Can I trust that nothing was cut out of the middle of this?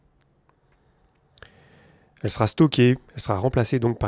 yes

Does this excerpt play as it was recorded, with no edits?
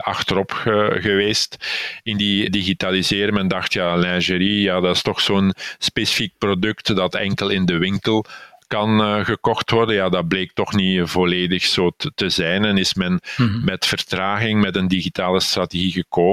no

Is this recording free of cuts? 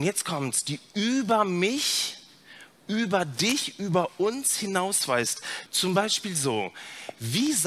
no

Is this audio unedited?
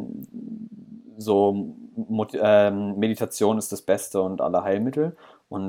yes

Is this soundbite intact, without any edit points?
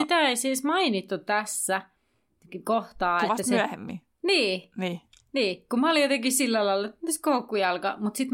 yes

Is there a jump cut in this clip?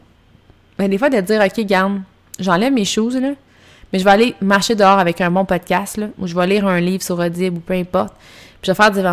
no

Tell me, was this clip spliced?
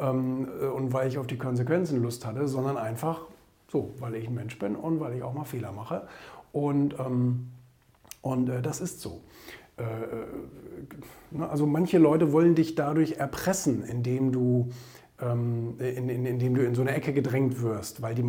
no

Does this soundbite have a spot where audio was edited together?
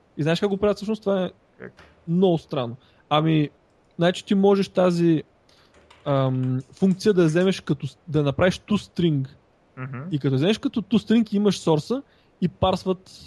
no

